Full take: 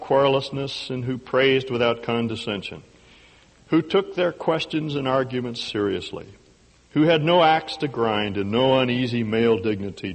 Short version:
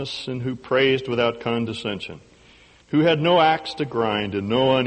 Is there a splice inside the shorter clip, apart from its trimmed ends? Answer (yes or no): yes